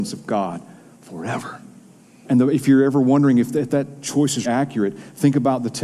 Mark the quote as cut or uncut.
cut